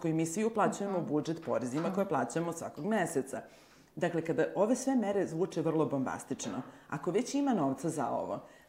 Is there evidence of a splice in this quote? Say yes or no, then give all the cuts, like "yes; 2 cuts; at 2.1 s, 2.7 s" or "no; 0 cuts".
no; 0 cuts